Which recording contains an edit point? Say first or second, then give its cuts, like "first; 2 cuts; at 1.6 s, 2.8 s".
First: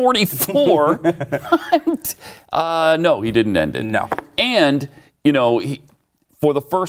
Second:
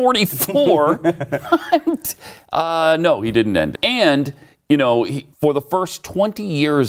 second; 2 cuts; at 3.7 s, 5.3 s